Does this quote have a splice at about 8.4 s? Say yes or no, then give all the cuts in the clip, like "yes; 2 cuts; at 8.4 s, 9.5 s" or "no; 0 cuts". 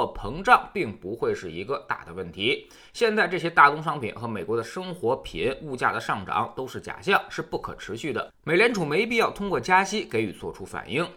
no; 0 cuts